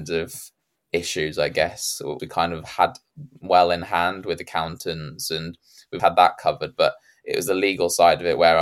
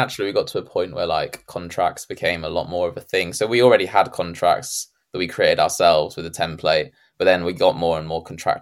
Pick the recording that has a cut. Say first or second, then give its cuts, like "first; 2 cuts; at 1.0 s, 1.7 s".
first; 2 cuts; at 2.2 s, 6.0 s